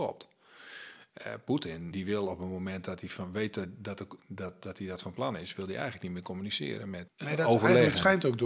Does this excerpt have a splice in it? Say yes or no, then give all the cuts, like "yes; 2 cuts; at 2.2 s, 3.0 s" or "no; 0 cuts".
yes; 3 cuts; at 1.9 s, 3.7 s, 7.1 s